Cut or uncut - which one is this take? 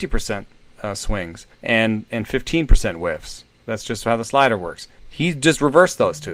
cut